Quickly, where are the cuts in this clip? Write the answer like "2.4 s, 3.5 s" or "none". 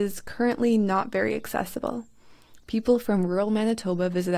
2.6 s

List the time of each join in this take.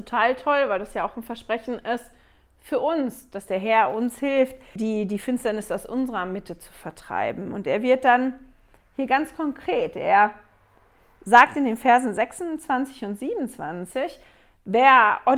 4.8 s

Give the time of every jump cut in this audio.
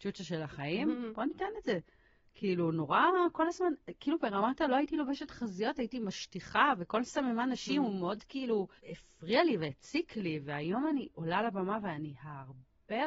8.8 s

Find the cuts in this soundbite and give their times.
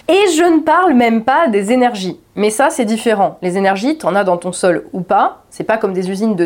none

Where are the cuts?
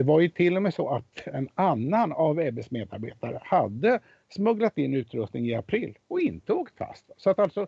none

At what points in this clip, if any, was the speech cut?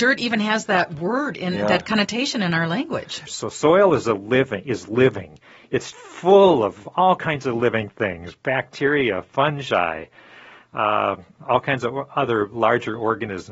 3.3 s, 5.9 s

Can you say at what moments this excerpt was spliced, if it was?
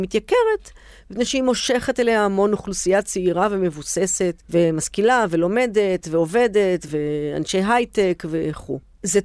none

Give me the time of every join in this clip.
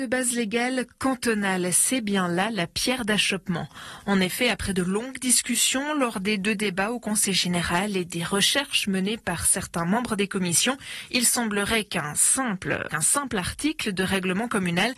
12.9 s

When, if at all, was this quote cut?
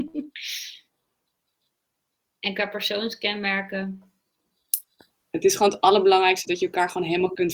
5.1 s

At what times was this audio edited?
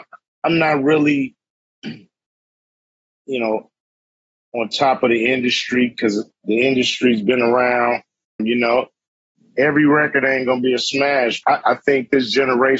8.4 s, 11.4 s

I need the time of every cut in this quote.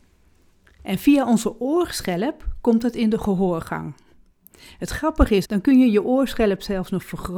5.4 s

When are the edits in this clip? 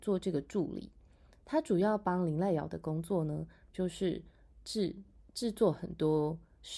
none

